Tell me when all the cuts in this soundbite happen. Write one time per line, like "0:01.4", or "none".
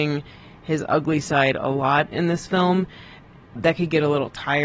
0:03.6